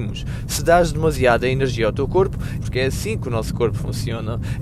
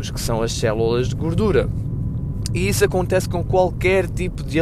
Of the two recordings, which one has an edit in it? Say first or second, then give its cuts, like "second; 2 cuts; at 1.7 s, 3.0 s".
first; 1 cut; at 2.6 s